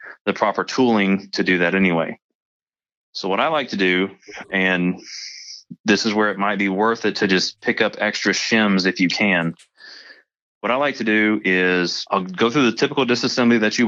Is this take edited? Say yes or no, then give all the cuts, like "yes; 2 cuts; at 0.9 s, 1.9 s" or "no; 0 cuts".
no; 0 cuts